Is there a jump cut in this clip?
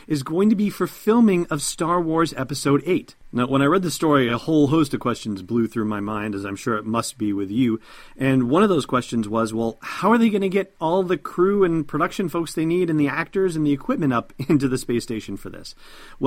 no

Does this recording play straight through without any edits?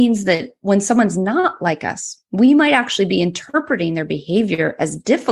yes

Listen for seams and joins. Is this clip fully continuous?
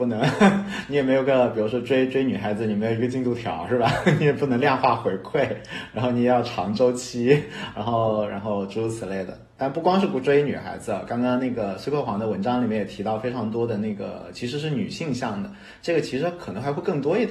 yes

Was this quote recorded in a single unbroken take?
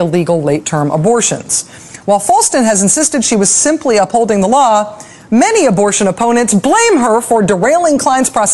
yes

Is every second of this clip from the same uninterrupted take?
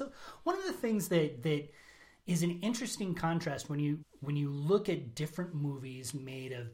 no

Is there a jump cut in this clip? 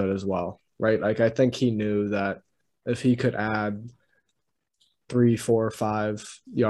no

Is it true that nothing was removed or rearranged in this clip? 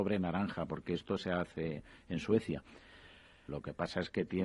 no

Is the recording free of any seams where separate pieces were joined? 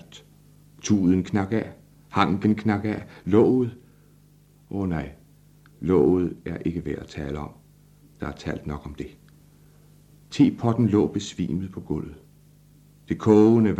yes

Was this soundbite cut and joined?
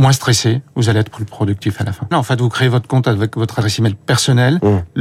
yes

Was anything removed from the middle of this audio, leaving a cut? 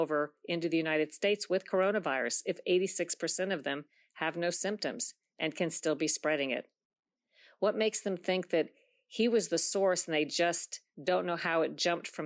no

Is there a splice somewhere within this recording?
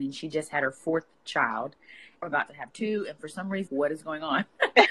yes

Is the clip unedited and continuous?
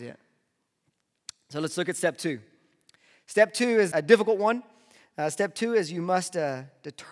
no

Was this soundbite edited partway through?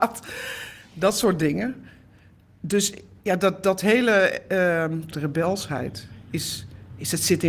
yes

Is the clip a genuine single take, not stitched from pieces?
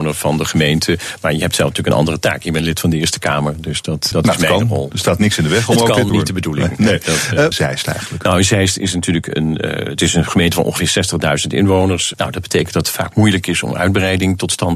no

